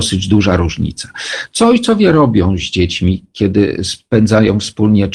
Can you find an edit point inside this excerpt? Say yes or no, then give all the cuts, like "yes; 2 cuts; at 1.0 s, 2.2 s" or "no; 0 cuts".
no; 0 cuts